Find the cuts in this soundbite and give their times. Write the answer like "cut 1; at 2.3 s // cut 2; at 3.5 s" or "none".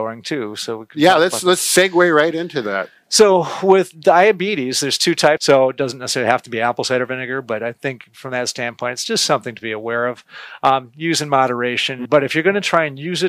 cut 1; at 5.4 s // cut 2; at 12.1 s